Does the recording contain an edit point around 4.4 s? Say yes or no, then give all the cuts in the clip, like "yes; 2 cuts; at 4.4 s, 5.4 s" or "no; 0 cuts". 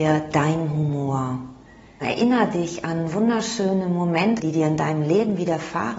yes; 2 cuts; at 2.0 s, 4.4 s